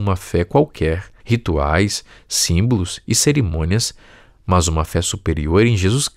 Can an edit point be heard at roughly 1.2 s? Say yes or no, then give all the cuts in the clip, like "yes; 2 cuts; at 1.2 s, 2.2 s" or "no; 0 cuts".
yes; 1 cut; at 1.2 s